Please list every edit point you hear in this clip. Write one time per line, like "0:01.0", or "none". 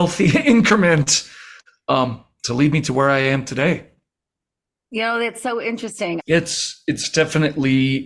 0:06.2